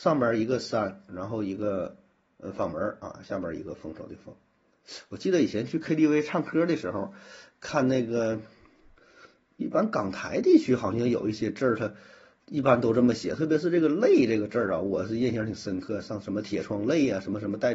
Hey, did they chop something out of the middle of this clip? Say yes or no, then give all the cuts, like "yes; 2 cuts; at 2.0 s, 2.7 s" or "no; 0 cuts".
no; 0 cuts